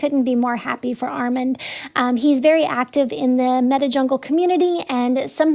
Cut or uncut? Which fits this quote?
uncut